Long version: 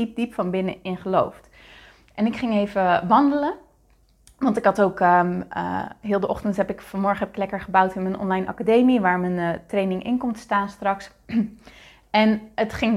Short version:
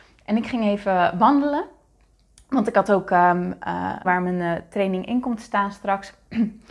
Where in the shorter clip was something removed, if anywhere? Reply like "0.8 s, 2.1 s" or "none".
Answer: 4.0 s

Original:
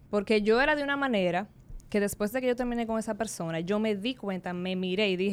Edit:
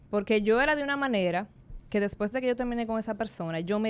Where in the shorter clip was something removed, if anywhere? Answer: none

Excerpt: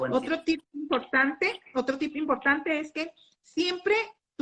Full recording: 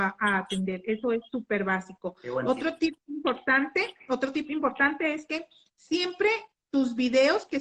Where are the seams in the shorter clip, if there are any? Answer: none

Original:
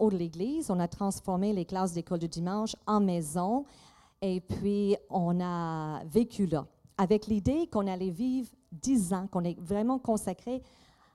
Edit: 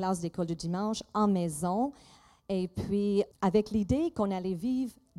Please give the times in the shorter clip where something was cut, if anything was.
3.3 s

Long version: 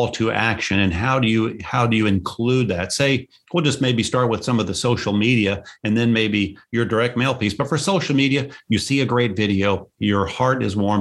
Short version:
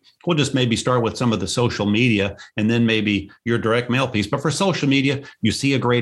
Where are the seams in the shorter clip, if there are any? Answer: none

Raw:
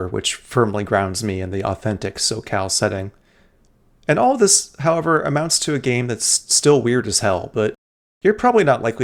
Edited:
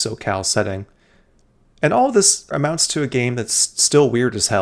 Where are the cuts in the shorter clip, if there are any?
2.5 s

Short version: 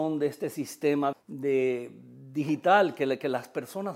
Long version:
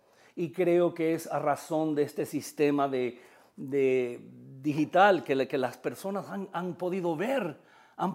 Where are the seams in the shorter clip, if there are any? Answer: 1.1 s

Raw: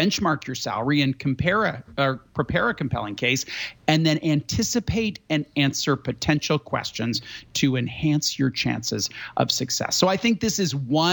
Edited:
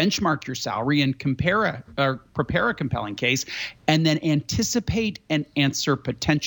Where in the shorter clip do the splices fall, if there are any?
none

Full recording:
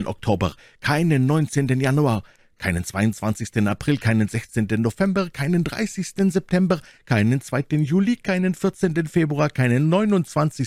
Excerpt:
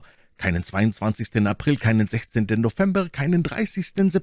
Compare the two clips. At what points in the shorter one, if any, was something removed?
none

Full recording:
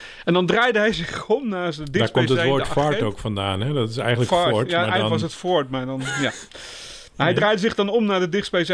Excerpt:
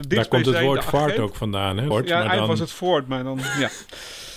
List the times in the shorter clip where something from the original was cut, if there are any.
1.9 s

